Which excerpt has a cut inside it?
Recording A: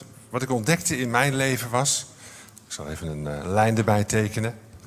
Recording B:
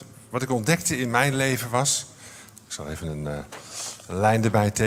A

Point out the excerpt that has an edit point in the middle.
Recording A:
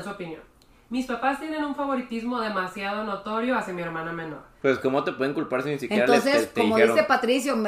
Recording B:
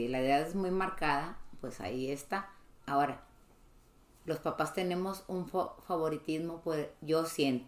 A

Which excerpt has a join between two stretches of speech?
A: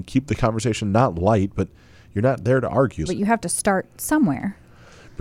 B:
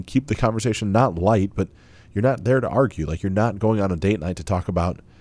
A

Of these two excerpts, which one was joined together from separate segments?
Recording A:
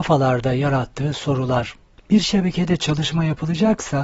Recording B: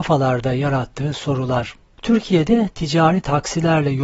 A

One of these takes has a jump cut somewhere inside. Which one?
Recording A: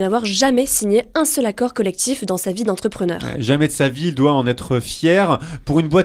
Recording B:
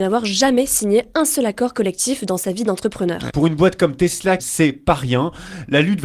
B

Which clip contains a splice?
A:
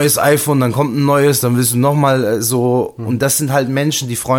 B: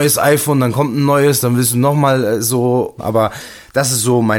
B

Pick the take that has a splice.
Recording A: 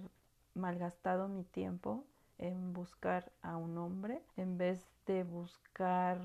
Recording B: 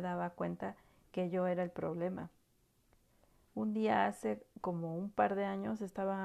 A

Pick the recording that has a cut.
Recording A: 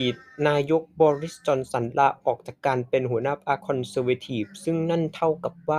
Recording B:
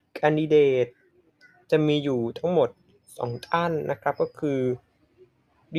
A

